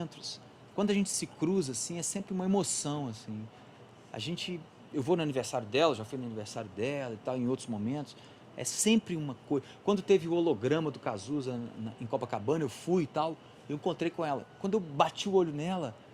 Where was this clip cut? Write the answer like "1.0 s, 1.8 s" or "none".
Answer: none